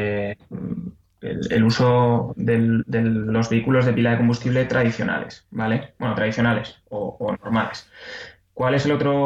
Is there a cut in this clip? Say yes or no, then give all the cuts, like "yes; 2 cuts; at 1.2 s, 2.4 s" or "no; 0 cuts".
no; 0 cuts